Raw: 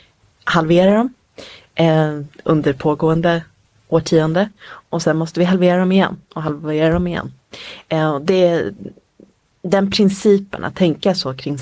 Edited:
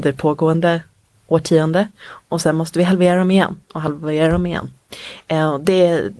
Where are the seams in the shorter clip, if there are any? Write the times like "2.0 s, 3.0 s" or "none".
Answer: none